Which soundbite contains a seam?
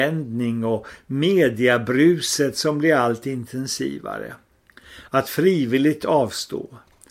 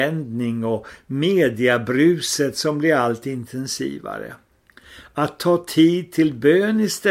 first; 1 cut; at 5.1 s

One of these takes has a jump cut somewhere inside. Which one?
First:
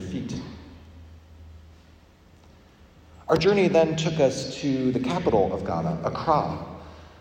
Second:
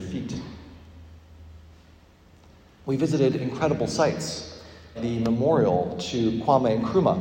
second; 2 cuts; at 2.8 s, 4.9 s

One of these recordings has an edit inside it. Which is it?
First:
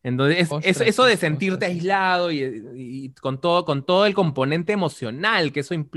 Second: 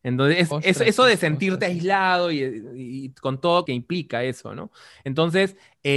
second; 1 cut; at 3.7 s

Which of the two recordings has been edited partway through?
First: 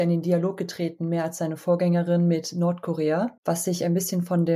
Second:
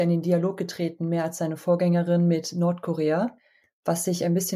first; 1 cut; at 3.4 s

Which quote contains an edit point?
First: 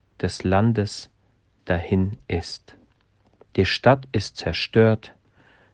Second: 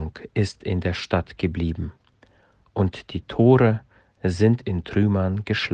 first; 1 cut; at 3.5 s

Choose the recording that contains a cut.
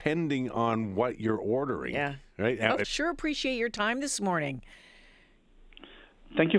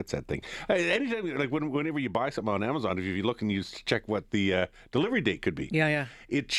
first; 1 cut; at 2.8 s

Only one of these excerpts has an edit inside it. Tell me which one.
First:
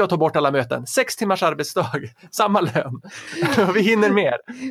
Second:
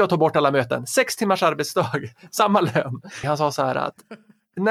second; 1 cut; at 3.2 s

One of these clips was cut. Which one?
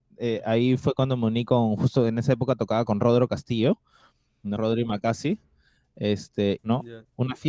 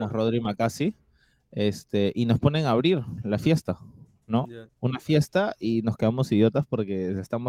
first; 2 cuts; at 4.6 s, 6.6 s

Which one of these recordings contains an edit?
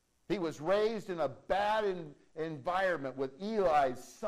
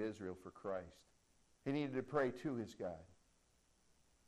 second; 1 cut; at 1.4 s

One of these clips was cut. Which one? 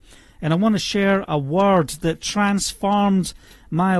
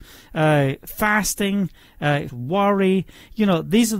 second; 1 cut; at 2.3 s

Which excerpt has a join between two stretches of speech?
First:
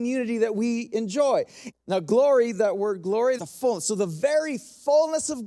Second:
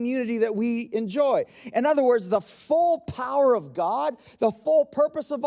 first; 2 cuts; at 1.7 s, 3.4 s

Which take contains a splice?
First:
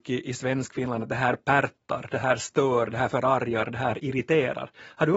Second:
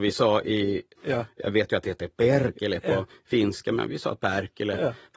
second; 1 cut; at 1.0 s

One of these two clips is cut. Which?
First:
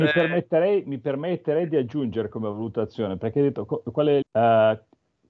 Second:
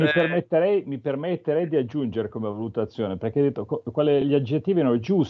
first; 1 cut; at 4.2 s

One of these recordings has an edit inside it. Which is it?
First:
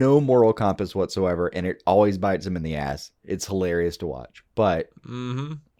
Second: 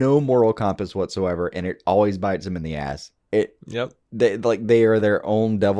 first; 1 cut; at 3.2 s

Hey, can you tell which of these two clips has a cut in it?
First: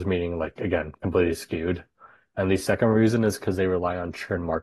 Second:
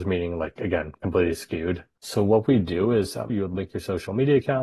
second; 2 cuts; at 2.0 s, 3.3 s

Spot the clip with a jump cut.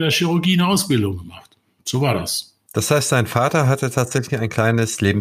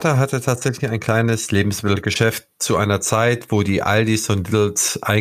first; 1 cut; at 2.7 s

